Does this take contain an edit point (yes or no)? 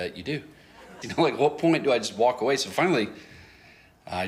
yes